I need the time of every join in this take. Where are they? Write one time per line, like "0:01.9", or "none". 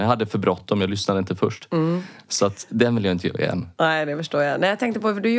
none